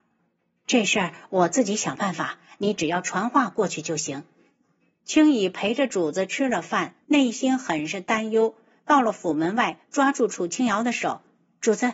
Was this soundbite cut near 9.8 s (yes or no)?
no